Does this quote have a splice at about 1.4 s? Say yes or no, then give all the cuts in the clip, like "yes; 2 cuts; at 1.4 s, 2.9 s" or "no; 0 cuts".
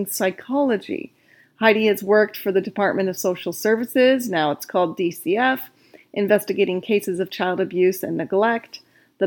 yes; 1 cut; at 1.4 s